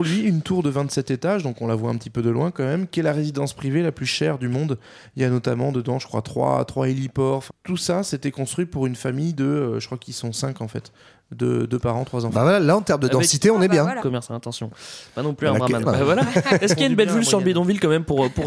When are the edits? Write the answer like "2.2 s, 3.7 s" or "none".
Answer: 7.5 s, 14.0 s, 15.9 s